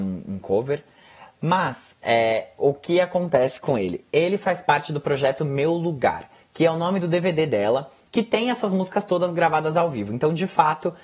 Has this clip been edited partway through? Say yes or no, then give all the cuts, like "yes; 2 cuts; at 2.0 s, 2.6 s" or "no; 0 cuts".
no; 0 cuts